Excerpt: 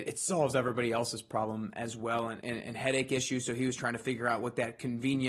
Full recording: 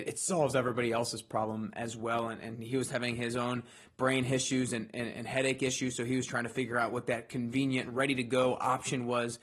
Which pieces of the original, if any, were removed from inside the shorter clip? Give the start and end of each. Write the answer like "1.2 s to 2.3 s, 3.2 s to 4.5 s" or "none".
2.4 s to 4.9 s